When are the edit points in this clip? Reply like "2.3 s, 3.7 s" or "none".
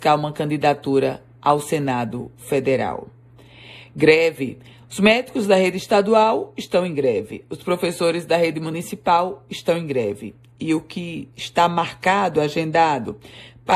none